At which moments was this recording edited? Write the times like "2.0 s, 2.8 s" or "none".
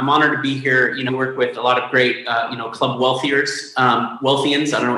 1.1 s